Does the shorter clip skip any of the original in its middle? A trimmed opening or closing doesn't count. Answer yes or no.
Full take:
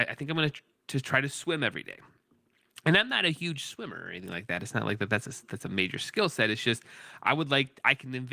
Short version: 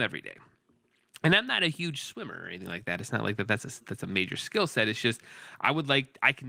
no